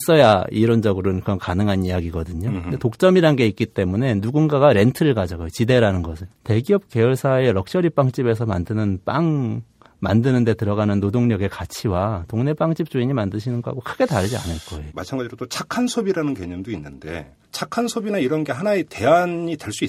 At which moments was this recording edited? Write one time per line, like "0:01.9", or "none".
0:06.3
0:14.9
0:17.4